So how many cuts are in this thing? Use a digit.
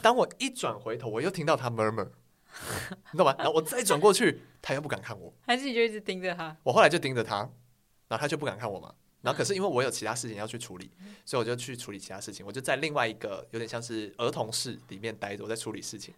0